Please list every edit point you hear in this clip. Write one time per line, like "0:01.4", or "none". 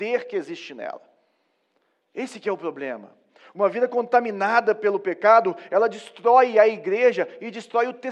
none